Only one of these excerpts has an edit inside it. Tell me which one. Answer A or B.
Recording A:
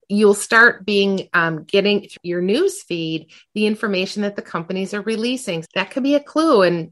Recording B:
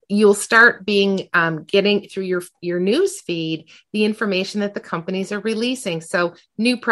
A